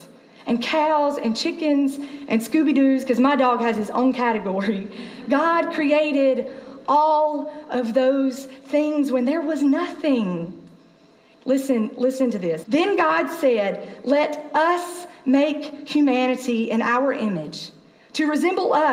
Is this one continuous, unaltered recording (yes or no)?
no